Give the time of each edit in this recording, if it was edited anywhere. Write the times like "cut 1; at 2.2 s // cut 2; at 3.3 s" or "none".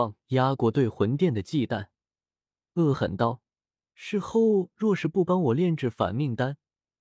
cut 1; at 2.9 s

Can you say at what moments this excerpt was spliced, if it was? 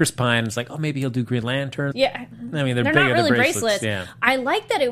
cut 1; at 1.9 s

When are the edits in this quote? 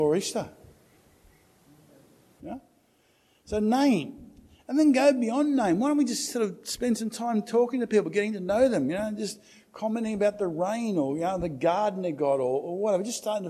cut 1; at 2.4 s

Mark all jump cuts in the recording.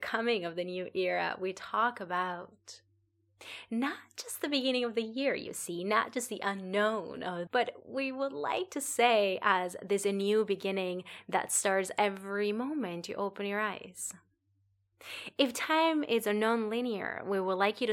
cut 1; at 7.5 s

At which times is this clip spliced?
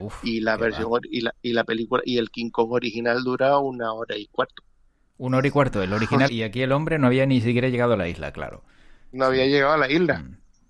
cut 1; at 6.3 s

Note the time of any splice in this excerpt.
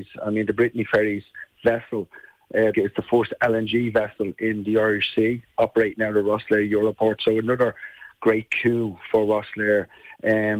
cut 1; at 2.7 s

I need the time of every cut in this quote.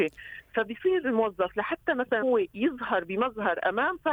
cut 1; at 2.2 s

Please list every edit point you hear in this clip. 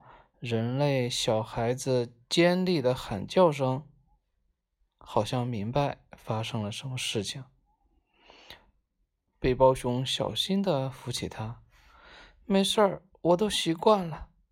cut 1; at 9.3 s

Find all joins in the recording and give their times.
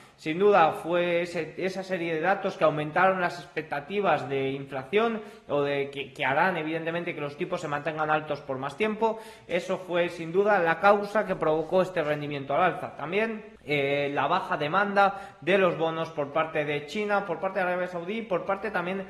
cut 1; at 13.6 s

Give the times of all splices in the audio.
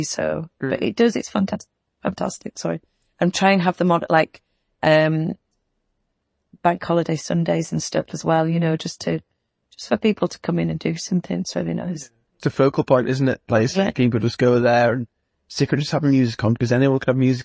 none

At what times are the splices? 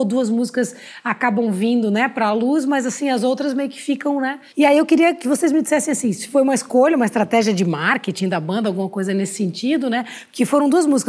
cut 1; at 4.5 s

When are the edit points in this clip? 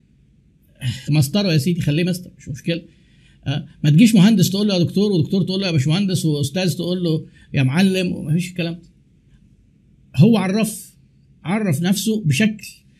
cut 1; at 1.1 s

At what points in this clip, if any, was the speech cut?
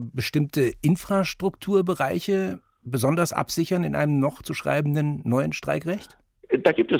none

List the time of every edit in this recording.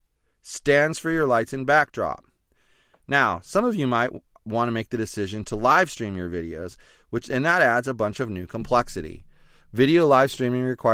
none

